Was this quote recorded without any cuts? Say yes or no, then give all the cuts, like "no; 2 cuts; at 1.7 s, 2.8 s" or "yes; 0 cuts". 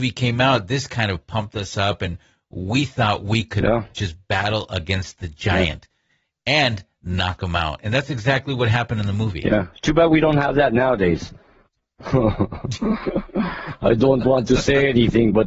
yes; 0 cuts